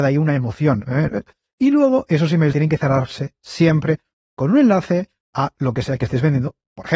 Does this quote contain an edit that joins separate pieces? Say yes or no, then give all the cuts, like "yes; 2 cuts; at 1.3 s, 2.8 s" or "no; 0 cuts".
yes; 2 cuts; at 1.1 s, 2.5 s